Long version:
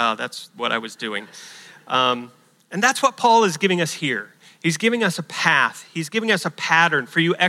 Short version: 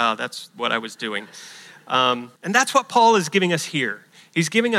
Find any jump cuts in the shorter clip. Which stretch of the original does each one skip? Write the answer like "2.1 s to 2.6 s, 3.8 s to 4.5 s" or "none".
2.4 s to 2.6 s

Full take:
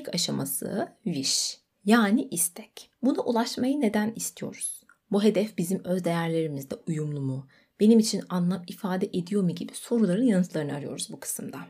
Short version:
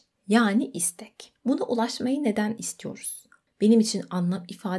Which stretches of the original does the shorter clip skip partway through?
5.0 s to 7.7 s

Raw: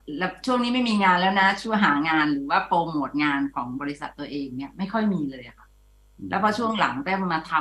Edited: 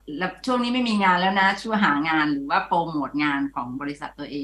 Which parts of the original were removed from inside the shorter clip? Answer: none

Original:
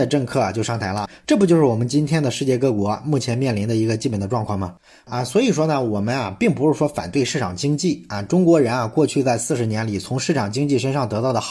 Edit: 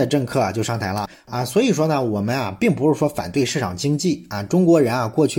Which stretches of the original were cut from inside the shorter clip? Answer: 1.1 s to 4.9 s

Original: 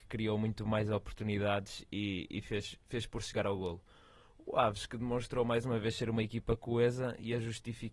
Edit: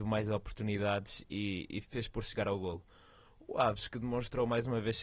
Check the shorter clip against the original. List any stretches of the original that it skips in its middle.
2.4 s to 2.8 s

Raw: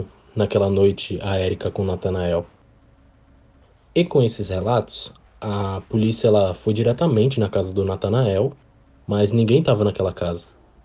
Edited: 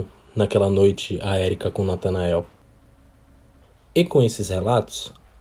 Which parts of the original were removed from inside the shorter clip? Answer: none

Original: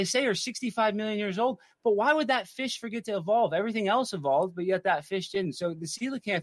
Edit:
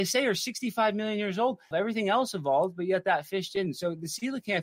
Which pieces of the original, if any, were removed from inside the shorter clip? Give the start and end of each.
1.7 s to 3.5 s

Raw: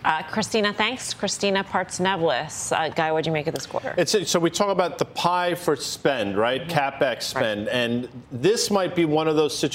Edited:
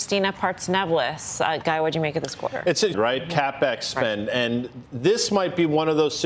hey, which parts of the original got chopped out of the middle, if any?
4.2 s to 6.3 s

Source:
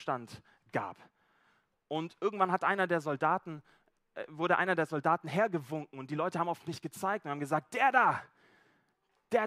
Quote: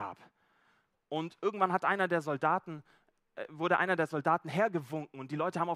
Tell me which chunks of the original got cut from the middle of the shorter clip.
none

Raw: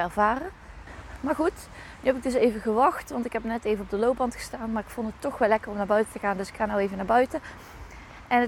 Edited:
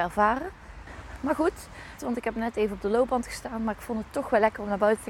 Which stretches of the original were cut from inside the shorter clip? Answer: 2.0 s to 3.1 s

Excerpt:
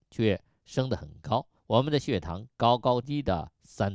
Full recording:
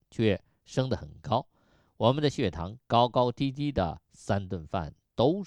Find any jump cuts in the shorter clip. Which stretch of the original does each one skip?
1.6 s to 1.9 s, 3.3 s to 3.5 s

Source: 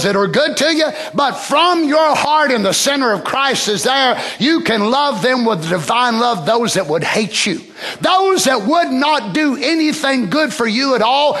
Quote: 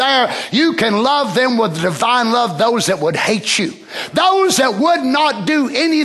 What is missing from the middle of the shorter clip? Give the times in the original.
none

